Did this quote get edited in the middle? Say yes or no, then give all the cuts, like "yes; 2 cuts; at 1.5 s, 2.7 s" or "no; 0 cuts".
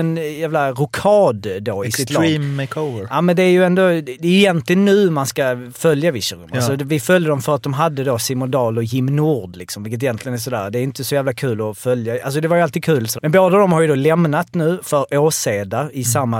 yes; 1 cut; at 13.2 s